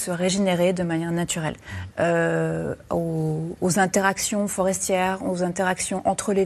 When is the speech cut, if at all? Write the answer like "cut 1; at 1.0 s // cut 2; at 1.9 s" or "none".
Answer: cut 1; at 1.9 s